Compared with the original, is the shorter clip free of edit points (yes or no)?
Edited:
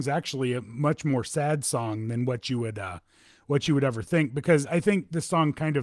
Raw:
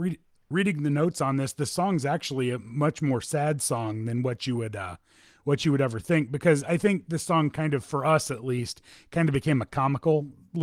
yes